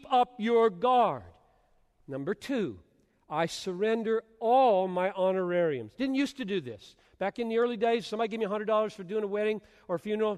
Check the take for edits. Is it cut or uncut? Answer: uncut